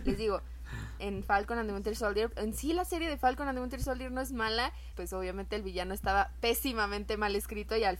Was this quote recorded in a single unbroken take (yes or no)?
no